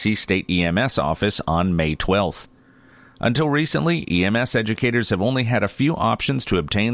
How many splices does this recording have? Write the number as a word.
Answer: zero